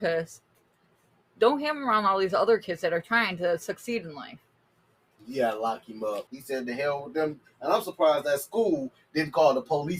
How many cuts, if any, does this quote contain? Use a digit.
1